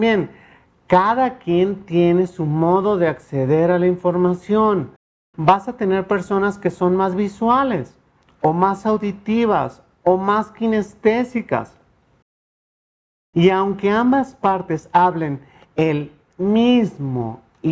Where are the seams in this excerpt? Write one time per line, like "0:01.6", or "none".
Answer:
none